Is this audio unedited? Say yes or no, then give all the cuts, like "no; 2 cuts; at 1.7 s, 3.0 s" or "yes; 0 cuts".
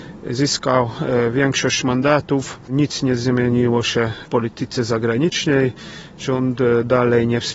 yes; 0 cuts